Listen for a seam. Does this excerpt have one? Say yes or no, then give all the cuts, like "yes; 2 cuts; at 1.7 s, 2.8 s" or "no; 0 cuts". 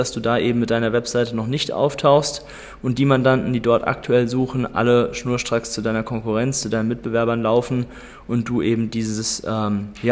no; 0 cuts